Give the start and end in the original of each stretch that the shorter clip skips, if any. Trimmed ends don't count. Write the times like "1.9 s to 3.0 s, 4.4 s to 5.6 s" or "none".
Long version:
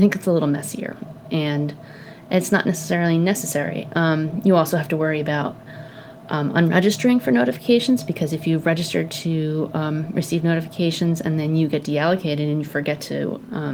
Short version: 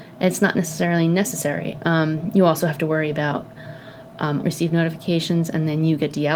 6.5 s to 10.1 s